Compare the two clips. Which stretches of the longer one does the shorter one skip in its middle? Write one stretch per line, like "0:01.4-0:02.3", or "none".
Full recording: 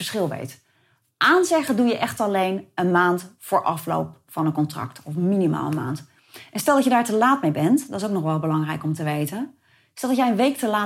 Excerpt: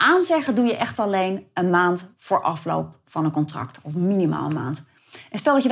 none